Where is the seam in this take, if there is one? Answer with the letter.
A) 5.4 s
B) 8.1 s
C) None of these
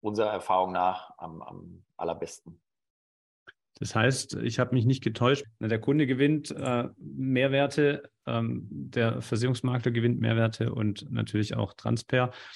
A